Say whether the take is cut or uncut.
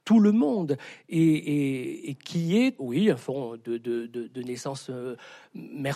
cut